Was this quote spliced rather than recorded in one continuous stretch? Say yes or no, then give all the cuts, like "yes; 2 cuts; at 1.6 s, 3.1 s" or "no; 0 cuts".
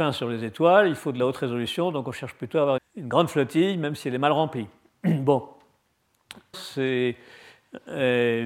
yes; 2 cuts; at 2.8 s, 6.5 s